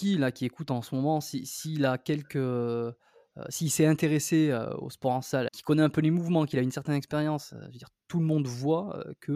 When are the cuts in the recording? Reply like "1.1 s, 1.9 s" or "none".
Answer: 5.5 s